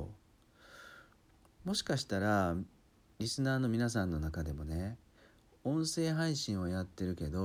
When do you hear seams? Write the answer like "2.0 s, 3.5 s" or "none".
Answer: none